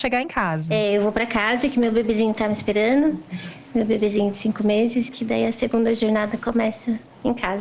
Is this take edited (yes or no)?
yes